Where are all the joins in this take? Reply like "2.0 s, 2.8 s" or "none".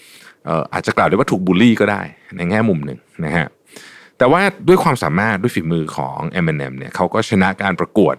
none